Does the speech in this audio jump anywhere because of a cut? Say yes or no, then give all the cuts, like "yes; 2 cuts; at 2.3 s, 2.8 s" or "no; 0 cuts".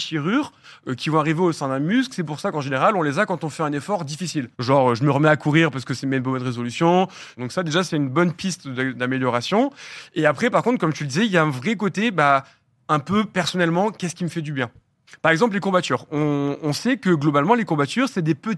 yes; 2 cuts; at 4.5 s, 7.4 s